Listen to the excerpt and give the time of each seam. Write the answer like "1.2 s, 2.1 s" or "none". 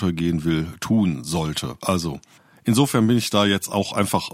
none